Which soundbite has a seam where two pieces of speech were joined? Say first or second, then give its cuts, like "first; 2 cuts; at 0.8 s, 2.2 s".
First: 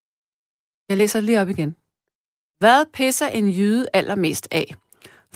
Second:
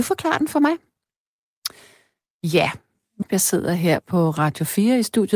second; 1 cut; at 3.3 s